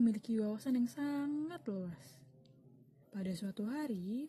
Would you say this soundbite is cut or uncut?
cut